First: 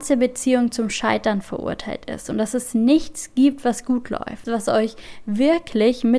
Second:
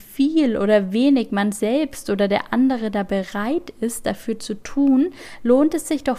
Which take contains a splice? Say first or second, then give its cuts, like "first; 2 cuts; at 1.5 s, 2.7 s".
first; 1 cut; at 4.4 s